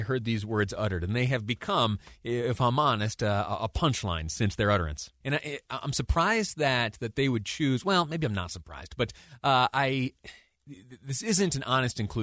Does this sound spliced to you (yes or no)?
yes